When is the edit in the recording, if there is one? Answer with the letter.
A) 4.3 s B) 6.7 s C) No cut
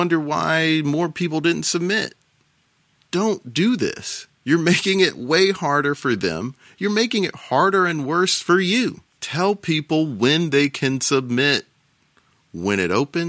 A